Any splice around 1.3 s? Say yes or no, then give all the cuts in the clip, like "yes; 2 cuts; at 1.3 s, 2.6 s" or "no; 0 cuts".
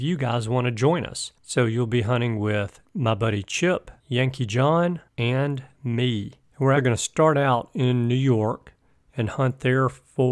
no; 1 cut; at 6.8 s